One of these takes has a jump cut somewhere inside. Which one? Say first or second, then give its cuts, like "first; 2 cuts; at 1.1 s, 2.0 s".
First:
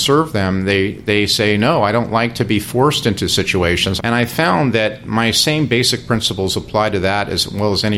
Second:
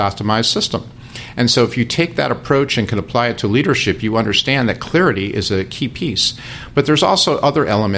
first; 1 cut; at 4.0 s